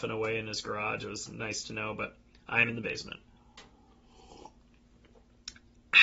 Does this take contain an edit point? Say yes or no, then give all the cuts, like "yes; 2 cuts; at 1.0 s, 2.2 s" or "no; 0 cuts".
no; 0 cuts